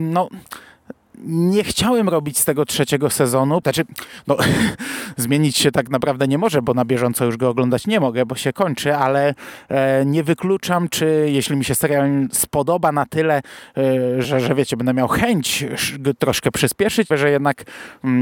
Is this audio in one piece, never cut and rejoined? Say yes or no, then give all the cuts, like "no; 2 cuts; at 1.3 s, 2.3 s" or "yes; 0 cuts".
no; 3 cuts; at 3.6 s, 14.2 s, 17.1 s